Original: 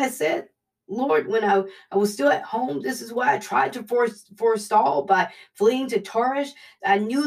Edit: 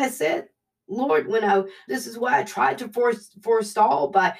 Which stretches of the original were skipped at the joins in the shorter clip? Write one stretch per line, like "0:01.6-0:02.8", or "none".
0:01.9-0:02.8